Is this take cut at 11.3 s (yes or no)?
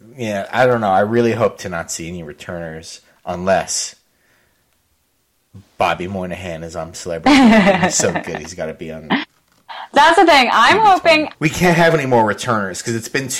yes